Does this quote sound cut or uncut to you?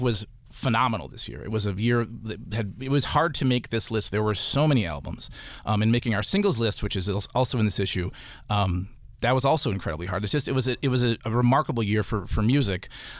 cut